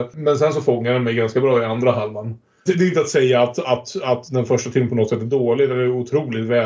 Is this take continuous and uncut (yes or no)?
yes